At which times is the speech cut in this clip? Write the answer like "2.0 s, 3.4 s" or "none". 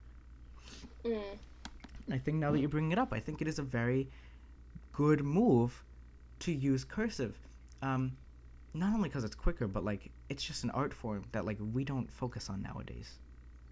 2.1 s